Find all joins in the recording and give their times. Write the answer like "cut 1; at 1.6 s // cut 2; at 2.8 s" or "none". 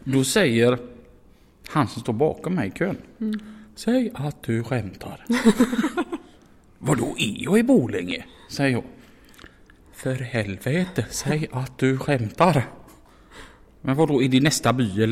none

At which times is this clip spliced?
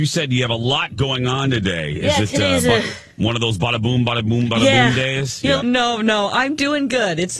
cut 1; at 5.6 s

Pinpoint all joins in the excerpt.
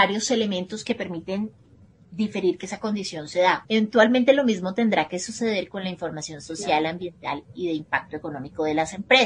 cut 1; at 3.6 s

